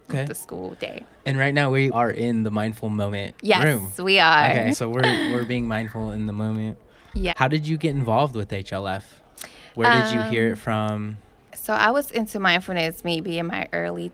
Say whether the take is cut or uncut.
cut